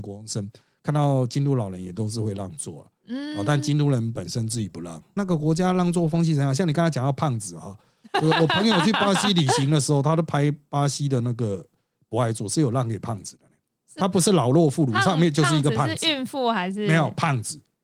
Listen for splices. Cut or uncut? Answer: cut